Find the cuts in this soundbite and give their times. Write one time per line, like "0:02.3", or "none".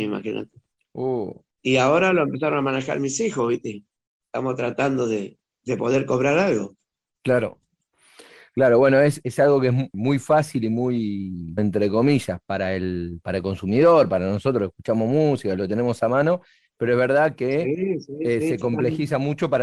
0:11.6